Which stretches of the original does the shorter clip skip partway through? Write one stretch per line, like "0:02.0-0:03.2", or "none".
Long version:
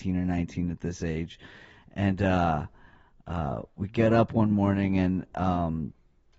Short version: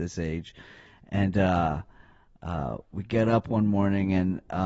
none